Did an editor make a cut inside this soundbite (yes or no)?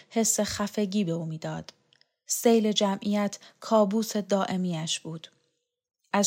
no